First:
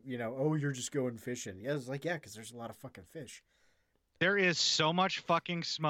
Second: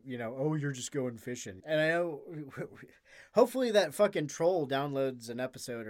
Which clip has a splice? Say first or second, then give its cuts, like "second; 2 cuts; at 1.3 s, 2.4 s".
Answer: second; 1 cut; at 1.6 s